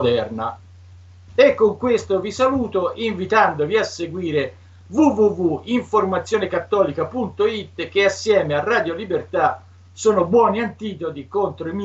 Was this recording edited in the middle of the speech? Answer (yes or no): yes